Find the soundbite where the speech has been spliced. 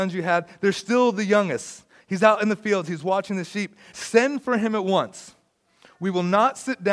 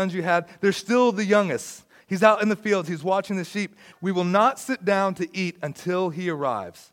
second; 1 cut; at 3.9 s

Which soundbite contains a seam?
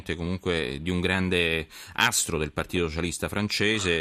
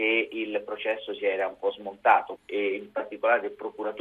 second; 1 cut; at 2.4 s

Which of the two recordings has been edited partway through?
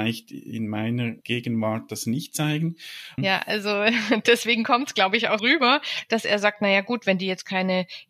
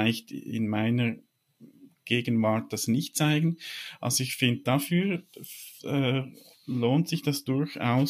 first; 3 cuts; at 1.2 s, 3.2 s, 5.4 s

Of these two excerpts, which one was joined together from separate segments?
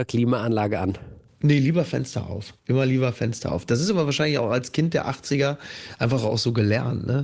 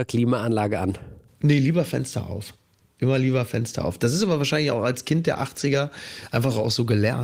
first; 1 cut; at 2.6 s

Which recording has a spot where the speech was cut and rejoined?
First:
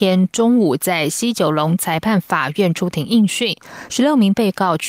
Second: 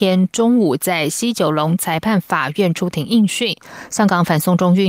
second; 1 cut; at 3.9 s

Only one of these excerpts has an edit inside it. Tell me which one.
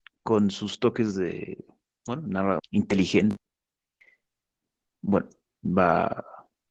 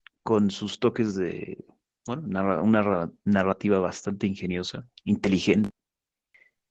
first; 1 cut; at 2.6 s

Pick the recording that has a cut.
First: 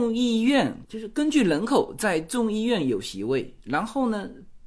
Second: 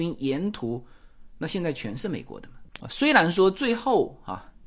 second; 1 cut; at 2.8 s

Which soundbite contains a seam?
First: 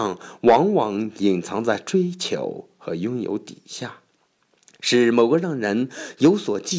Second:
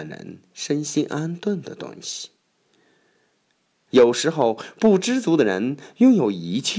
second; 1 cut; at 3.9 s

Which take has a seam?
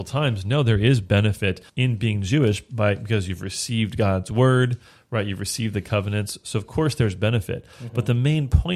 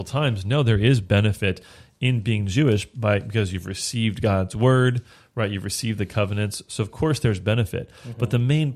first; 1 cut; at 1.7 s

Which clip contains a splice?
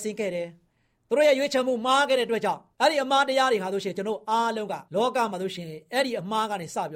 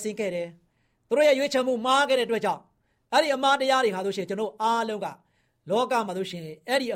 first; 2 cuts; at 2.7 s, 4.9 s

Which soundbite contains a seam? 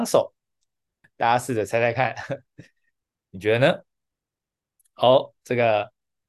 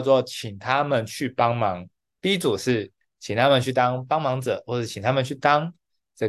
first; 1 cut; at 1.0 s

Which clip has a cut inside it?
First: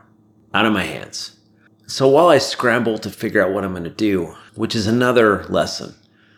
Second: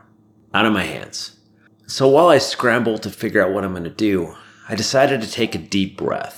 first; 1 cut; at 4.5 s

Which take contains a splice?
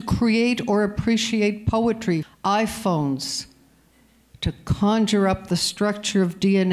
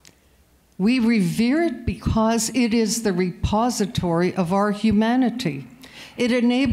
first; 1 cut; at 2.2 s

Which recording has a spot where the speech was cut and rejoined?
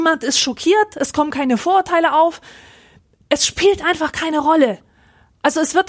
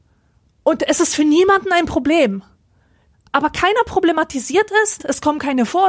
second; 2 cuts; at 3.1 s, 5.0 s

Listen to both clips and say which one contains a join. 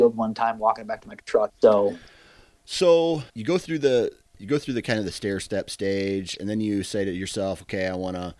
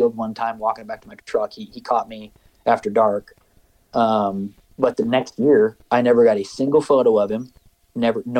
first; 2 cuts; at 1.5 s, 3.3 s

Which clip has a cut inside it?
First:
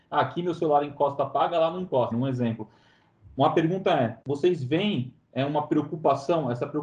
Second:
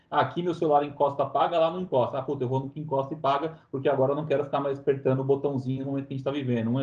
first; 2 cuts; at 2.1 s, 4.2 s

